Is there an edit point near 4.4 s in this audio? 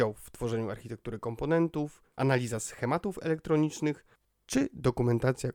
no; 1 cut; at 2.1 s

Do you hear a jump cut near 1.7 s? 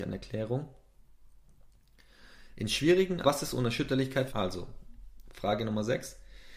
no; 2 cuts; at 3.2 s, 4.3 s

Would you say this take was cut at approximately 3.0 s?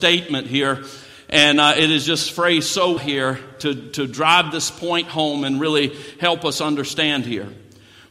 yes; 1 cut; at 3.0 s

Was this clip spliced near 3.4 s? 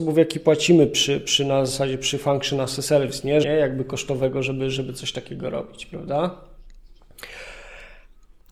yes; 1 cut; at 3.4 s

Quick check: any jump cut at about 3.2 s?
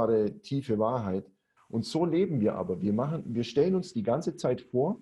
no; 1 cut; at 1.6 s

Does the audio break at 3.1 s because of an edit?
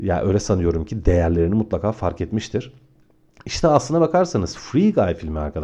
no; 0 cuts

